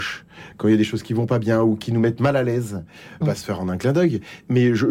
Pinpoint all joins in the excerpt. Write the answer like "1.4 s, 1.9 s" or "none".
3.2 s